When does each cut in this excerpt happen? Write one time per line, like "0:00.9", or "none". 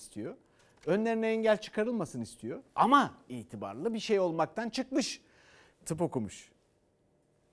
0:05.7